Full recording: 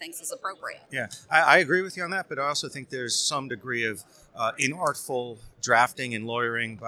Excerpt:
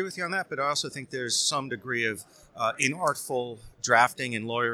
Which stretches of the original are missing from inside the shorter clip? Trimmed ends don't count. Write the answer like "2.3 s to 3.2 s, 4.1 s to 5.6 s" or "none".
none